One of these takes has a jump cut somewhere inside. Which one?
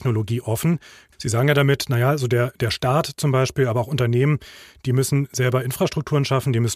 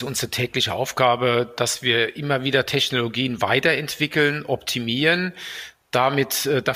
first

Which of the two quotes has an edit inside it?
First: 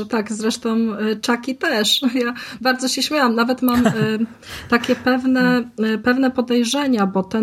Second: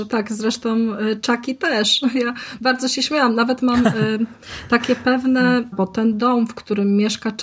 second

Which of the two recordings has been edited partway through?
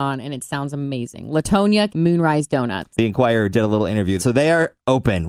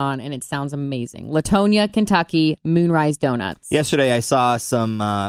first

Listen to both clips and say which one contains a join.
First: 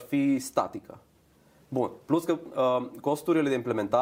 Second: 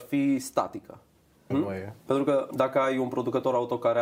second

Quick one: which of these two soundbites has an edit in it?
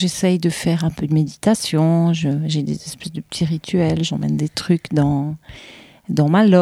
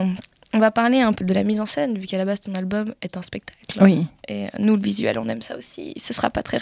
second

